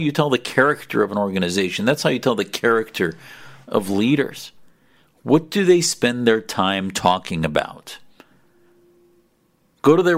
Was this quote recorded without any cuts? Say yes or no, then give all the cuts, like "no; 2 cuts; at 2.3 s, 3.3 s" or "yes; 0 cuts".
yes; 0 cuts